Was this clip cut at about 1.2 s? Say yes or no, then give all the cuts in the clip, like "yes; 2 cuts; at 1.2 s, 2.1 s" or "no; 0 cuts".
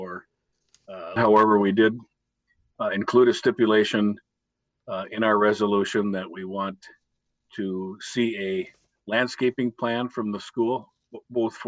yes; 1 cut; at 1.2 s